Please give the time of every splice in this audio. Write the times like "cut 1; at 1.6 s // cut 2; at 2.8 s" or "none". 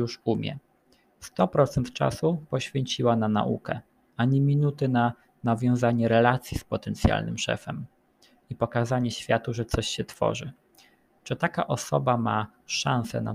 none